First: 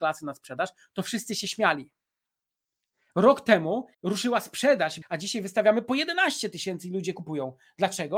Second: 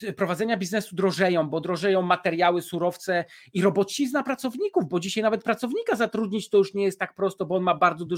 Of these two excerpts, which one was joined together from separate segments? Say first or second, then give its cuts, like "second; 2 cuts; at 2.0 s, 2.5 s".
first; 2 cuts; at 3.9 s, 5.0 s